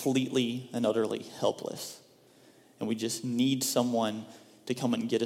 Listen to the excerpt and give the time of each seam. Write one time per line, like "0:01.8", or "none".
none